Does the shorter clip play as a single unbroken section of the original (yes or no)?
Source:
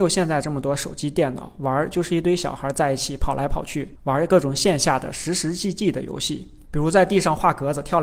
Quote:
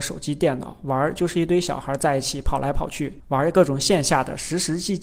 yes